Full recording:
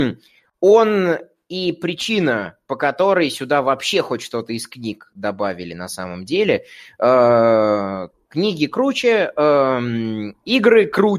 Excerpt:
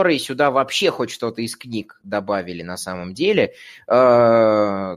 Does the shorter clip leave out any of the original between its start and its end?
no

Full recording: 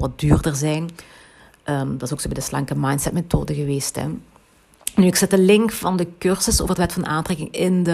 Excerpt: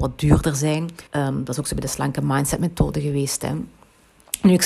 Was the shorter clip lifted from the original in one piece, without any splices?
no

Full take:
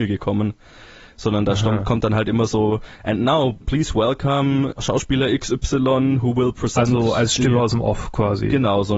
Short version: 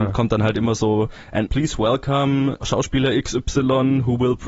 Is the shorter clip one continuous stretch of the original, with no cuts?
no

